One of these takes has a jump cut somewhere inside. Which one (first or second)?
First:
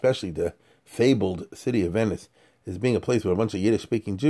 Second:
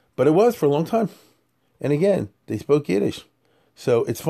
second